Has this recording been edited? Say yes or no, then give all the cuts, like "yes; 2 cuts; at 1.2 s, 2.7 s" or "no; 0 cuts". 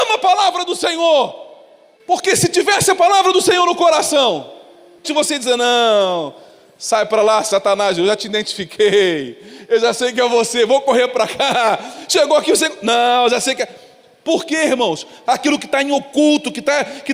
yes; 2 cuts; at 5.0 s, 15.3 s